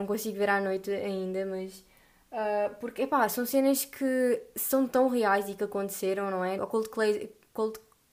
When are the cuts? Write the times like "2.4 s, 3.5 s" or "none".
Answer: 6.6 s